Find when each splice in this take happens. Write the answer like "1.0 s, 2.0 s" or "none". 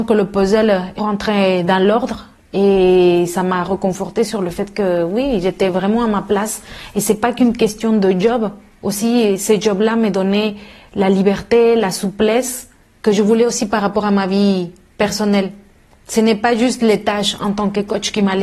1.0 s